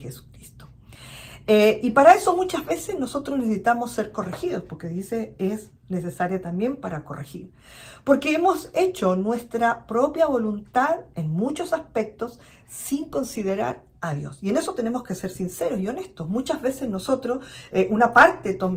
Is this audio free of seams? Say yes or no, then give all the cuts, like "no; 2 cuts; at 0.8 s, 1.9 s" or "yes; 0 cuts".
yes; 0 cuts